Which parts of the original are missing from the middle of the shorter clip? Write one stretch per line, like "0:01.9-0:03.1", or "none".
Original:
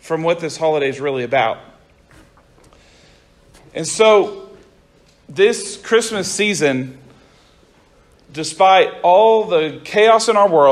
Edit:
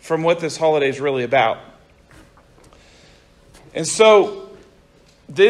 none